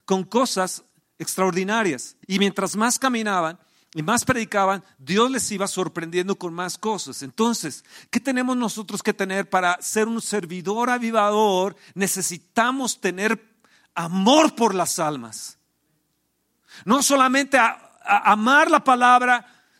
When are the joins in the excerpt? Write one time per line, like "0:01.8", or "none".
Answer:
0:02.2